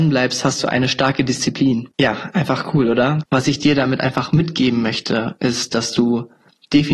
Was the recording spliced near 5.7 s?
no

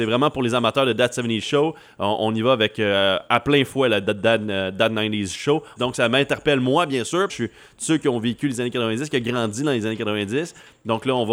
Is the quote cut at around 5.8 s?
yes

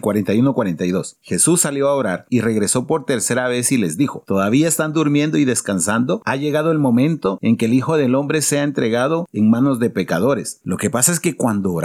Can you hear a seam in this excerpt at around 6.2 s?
yes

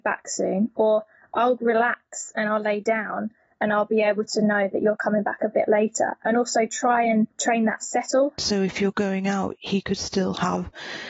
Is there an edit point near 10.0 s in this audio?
no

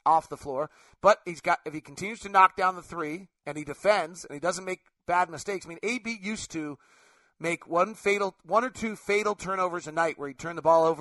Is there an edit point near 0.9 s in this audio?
no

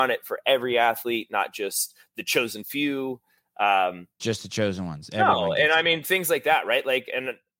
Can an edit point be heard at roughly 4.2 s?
yes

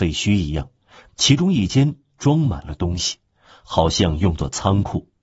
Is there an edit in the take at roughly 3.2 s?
no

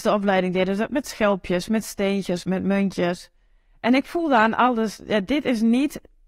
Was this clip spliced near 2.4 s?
yes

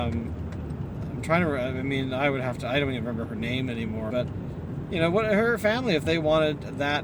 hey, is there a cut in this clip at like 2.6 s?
no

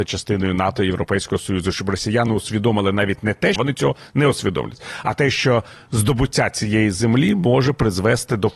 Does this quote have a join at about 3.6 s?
yes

